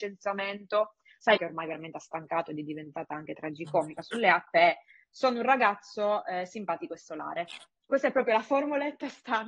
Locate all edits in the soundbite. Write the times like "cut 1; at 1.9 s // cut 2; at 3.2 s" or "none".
cut 1; at 1.4 s

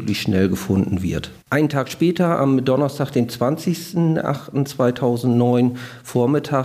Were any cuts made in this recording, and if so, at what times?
cut 1; at 1.4 s

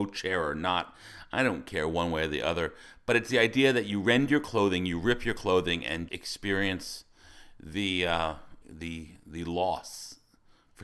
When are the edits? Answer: cut 1; at 6.1 s // cut 2; at 8.6 s

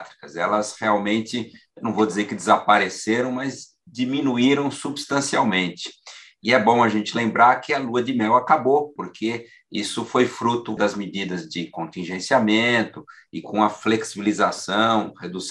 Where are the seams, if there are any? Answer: cut 1; at 9.0 s // cut 2; at 10.8 s

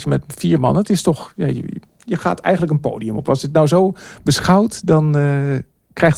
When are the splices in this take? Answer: cut 1; at 1.9 s

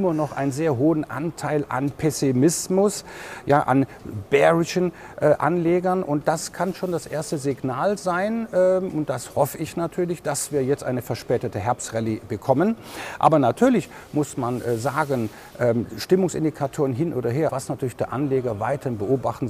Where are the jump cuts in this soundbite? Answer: cut 1; at 17.5 s

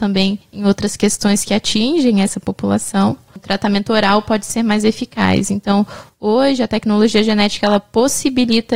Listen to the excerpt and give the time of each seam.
cut 1; at 3.3 s

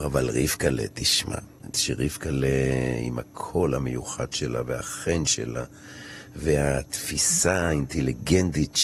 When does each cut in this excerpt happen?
cut 1; at 1.7 s

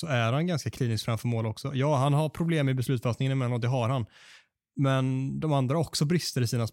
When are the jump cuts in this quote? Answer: none

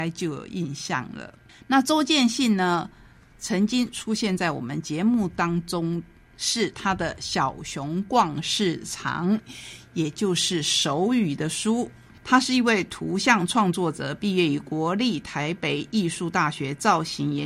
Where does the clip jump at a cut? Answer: none

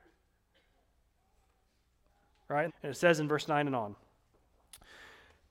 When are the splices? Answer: cut 1; at 2.7 s

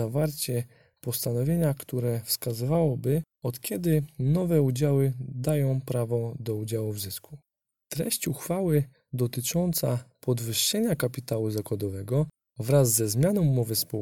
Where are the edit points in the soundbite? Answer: cut 1; at 7.7 s

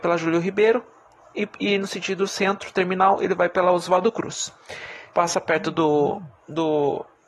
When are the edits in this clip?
cut 1; at 5.1 s

